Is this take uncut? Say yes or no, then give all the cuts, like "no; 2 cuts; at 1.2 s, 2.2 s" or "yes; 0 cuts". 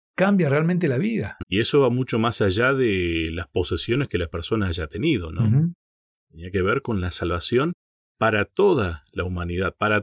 no; 2 cuts; at 1.4 s, 8.1 s